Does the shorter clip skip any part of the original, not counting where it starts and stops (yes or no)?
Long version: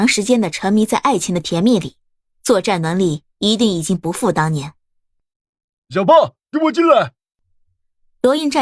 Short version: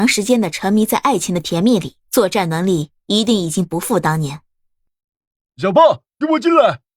yes